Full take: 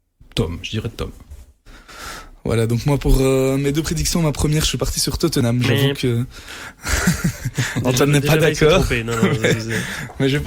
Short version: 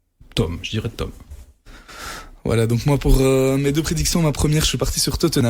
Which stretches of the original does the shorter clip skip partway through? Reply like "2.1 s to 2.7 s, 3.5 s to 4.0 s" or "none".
none

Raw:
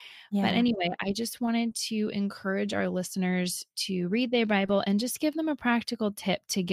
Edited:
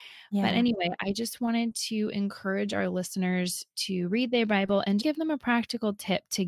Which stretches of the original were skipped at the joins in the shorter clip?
5.0 s to 5.2 s

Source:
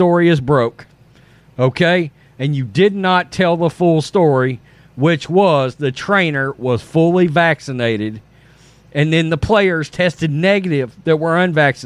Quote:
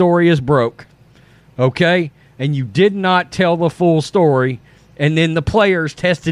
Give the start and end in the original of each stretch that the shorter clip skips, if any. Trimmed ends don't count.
4.8 s to 8.7 s

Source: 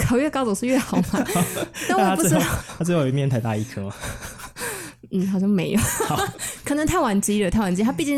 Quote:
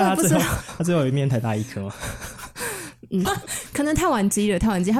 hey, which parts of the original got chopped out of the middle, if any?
5.3 s to 6.2 s

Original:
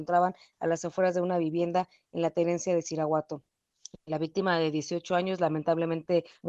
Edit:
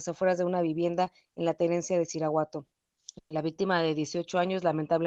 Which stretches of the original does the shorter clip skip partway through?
none

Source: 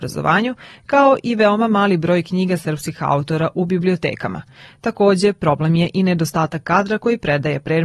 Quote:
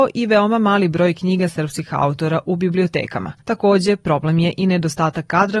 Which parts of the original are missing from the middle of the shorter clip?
4.5 s to 4.8 s

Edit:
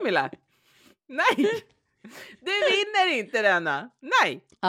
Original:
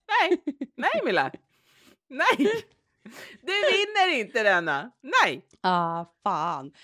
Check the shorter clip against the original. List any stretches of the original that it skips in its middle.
none

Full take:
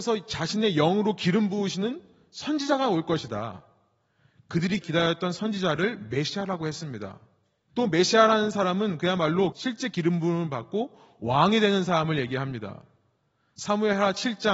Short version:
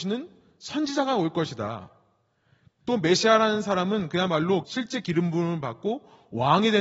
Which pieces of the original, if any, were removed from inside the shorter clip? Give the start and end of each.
4.4 s to 7.6 s

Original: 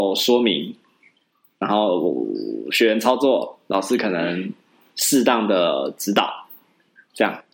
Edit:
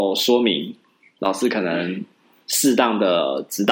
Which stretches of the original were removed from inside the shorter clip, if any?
1.2 s to 3.7 s

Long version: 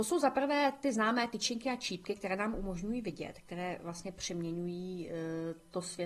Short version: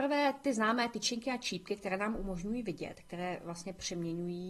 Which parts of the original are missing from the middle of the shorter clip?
none

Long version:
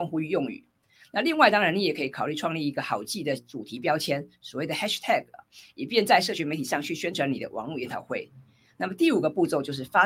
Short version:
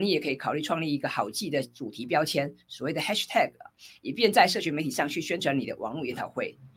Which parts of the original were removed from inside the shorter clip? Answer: none

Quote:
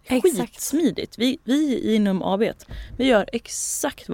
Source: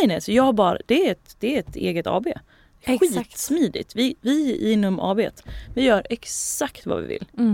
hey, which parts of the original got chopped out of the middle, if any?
none

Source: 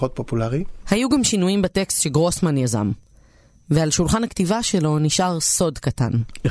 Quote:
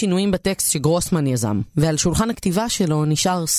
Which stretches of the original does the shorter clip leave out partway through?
3.0 s to 3.6 s

